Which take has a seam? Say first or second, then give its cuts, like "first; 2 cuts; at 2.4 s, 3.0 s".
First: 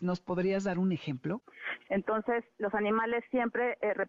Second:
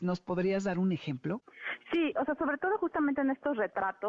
first; 1 cut; at 1.9 s